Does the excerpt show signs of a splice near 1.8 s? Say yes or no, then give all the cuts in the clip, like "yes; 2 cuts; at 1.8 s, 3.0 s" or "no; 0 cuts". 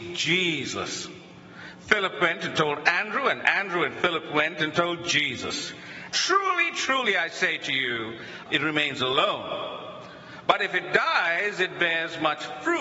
no; 2 cuts; at 6.1 s, 8.5 s